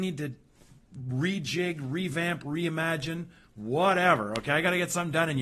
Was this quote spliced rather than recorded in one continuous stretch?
no; 0 cuts

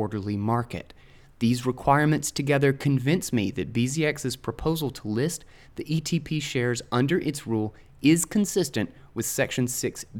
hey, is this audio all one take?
yes; 0 cuts

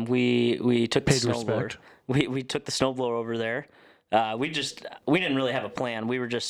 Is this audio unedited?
yes; 0 cuts

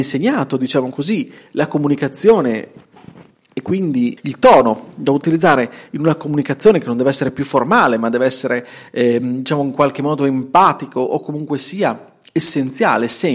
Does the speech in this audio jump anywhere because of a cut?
yes; 1 cut; at 4.2 s

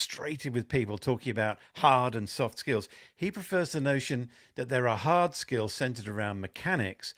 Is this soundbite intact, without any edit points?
yes; 0 cuts

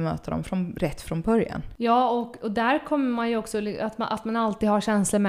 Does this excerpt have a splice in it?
no; 0 cuts

